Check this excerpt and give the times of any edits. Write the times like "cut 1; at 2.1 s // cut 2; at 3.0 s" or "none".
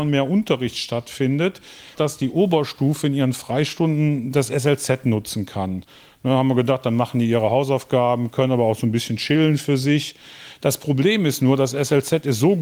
cut 1; at 1.9 s